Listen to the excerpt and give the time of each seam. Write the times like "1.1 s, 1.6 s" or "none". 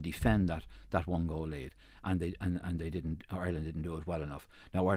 none